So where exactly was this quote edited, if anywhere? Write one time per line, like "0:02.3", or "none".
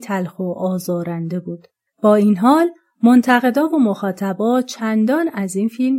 0:01.9